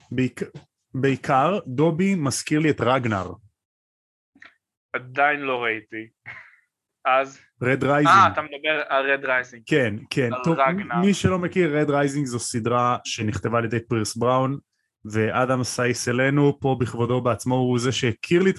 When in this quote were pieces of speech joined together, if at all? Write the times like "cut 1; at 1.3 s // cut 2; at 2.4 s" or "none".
cut 1; at 6.9 s